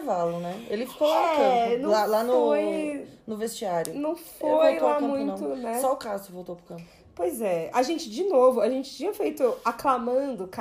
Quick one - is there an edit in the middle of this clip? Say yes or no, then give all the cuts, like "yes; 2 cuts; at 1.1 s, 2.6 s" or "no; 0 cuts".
no; 0 cuts